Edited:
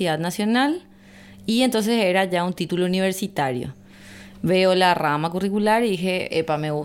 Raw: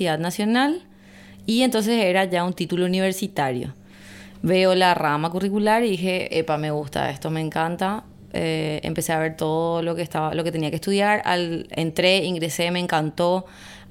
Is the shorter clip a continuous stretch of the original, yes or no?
yes